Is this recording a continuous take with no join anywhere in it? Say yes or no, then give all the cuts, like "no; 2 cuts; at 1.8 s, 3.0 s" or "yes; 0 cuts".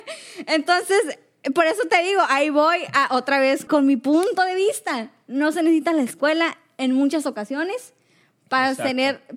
no; 1 cut; at 3.7 s